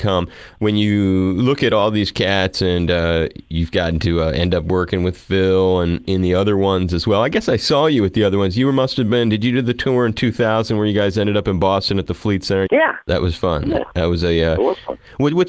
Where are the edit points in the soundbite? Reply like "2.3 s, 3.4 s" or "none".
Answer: 12.7 s